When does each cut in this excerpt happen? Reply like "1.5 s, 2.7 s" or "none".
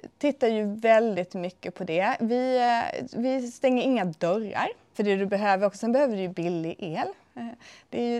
4.9 s